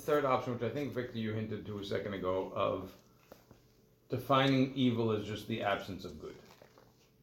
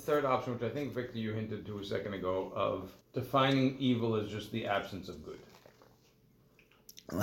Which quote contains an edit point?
second; 1 cut; at 3.0 s

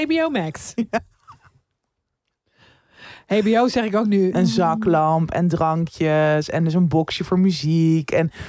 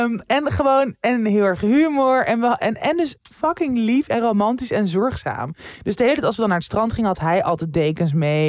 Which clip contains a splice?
first; 1 cut; at 4.3 s

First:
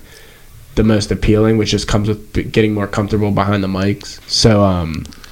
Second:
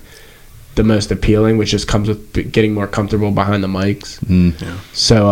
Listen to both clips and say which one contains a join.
first; 1 cut; at 4.2 s

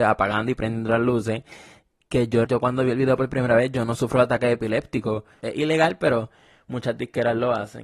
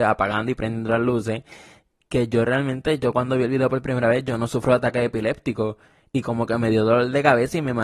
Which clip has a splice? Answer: first; 2 cuts; at 2.5 s, 5.4 s

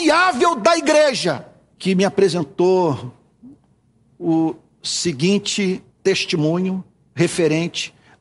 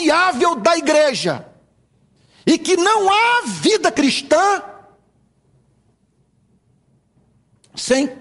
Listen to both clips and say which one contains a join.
first; 2 cuts; at 1.7 s, 5.9 s

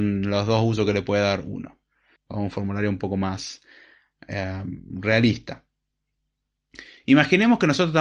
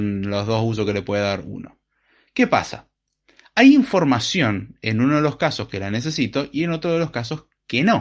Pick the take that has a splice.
first; 1 cut; at 2.2 s

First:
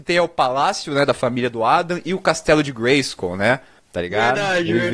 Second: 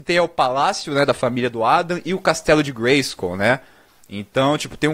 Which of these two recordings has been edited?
first; 1 cut; at 3.8 s

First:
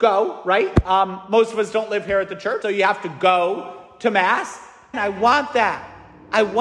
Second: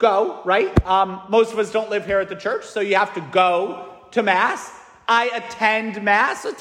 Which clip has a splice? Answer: first; 2 cuts; at 2.6 s, 4.9 s

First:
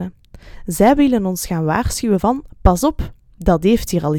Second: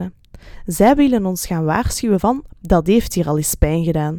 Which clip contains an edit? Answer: second; 1 cut; at 2.5 s

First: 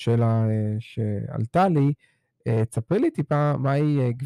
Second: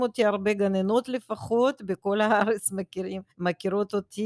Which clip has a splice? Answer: second; 1 cut; at 3.3 s

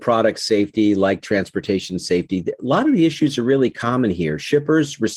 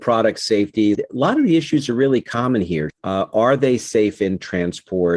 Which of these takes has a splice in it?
second; 2 cuts; at 0.9 s, 2.9 s

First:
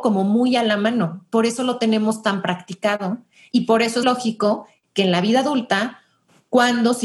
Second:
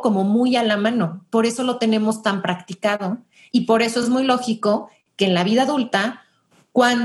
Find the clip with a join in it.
first; 1 cut; at 4.0 s

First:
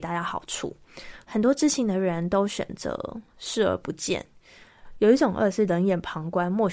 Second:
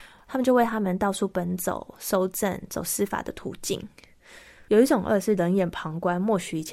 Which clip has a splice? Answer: second; 1 cut; at 4.7 s

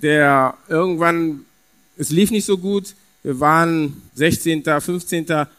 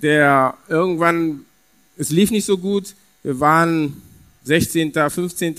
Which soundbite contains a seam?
first; 1 cut; at 4.1 s

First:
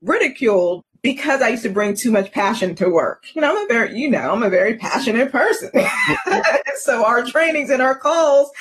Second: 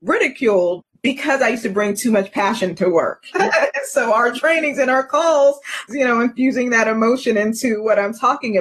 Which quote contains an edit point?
second; 2 cuts; at 3.3 s, 5.9 s

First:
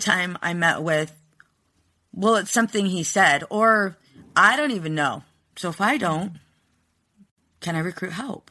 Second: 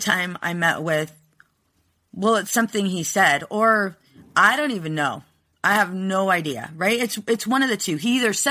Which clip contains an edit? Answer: first; 1 cut; at 5.5 s

